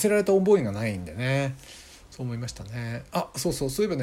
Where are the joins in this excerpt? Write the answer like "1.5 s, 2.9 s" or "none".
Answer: none